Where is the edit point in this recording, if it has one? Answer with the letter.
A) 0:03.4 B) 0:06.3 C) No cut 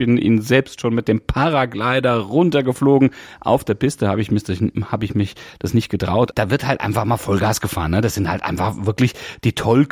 B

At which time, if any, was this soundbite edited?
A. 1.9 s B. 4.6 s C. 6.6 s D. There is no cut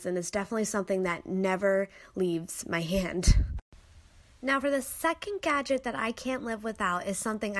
D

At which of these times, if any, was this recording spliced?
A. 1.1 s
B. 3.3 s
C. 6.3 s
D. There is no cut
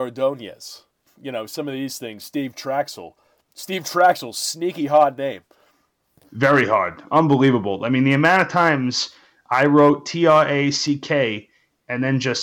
D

